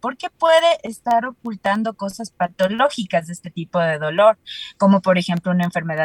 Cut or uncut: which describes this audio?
uncut